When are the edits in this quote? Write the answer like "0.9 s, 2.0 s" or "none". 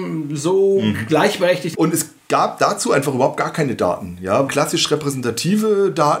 1.7 s, 4.5 s